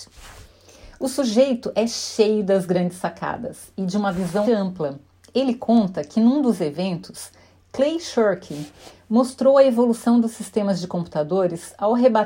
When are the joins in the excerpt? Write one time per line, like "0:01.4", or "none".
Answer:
0:04.4